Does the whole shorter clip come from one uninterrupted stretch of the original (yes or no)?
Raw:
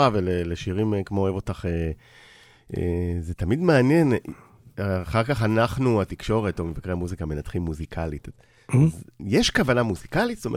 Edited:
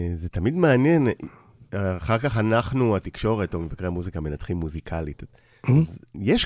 yes